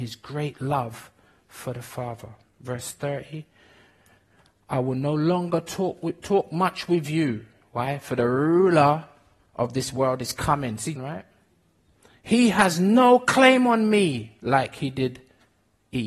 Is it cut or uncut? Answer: cut